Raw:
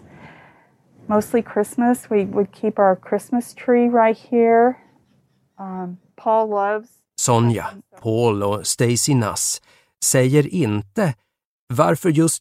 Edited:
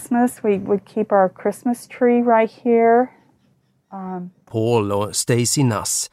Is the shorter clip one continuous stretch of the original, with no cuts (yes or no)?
no